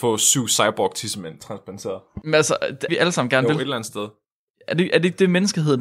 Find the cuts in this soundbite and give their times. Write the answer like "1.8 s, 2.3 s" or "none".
2.9 s